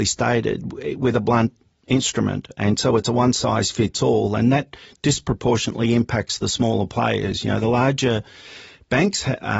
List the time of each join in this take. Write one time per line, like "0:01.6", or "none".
none